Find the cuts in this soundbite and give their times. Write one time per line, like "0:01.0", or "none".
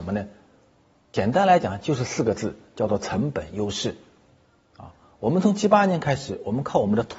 none